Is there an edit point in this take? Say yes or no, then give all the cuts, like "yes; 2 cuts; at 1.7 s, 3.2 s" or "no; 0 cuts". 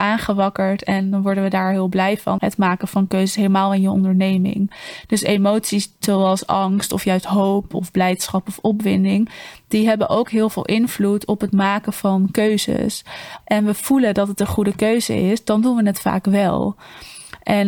yes; 2 cuts; at 2.4 s, 13.4 s